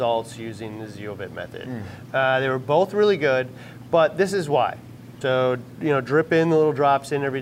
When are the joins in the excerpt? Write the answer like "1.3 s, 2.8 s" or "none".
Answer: 2.1 s, 5.2 s

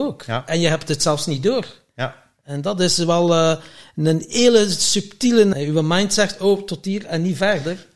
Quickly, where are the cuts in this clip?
5.5 s

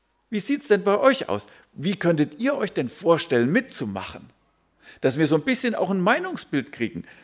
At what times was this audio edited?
none

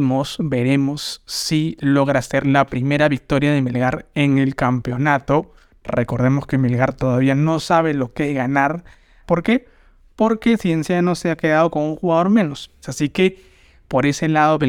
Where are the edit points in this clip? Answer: 9.2 s, 12.8 s

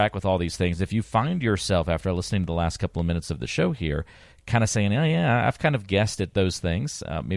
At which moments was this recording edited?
none

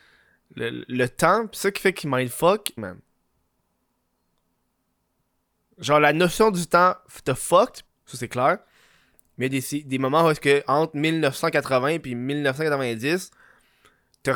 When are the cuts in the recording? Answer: 2.8 s, 7.9 s

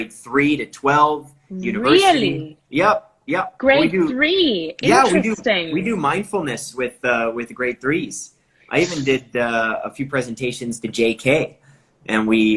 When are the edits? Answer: none

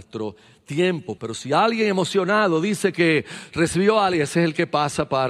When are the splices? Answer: 1.2 s

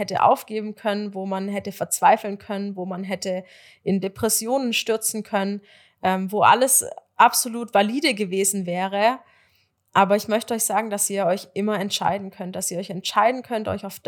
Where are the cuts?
none

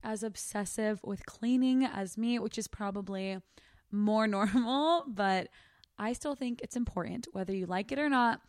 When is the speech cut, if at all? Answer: none

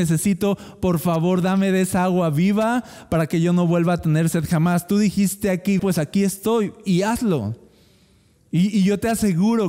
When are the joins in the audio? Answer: 5.8 s

